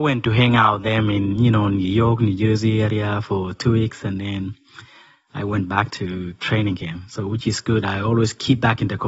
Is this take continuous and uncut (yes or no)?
yes